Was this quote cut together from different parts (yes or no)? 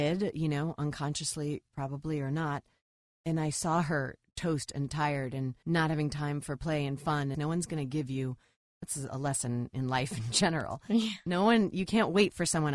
yes